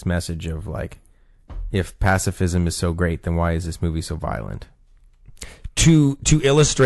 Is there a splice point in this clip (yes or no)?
no